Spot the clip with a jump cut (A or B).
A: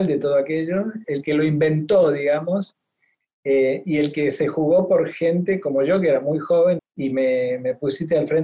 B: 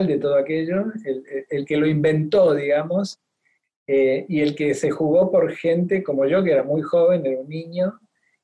A